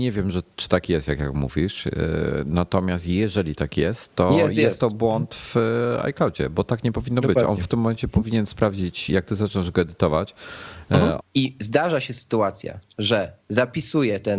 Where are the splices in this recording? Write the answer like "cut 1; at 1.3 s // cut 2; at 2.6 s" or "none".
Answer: cut 1; at 11.2 s